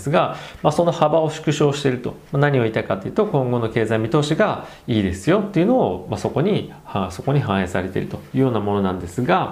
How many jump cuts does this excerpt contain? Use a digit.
1